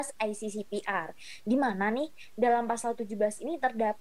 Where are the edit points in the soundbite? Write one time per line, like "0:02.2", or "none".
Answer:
none